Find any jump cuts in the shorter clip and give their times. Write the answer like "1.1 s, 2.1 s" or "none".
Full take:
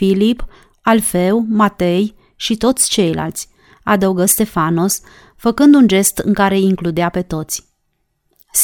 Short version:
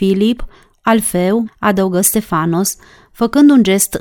1.5 s